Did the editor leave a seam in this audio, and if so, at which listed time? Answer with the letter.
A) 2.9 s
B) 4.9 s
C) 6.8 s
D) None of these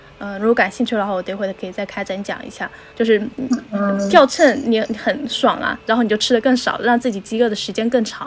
A